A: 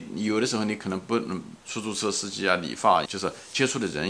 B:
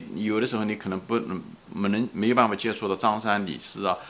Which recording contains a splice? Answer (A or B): A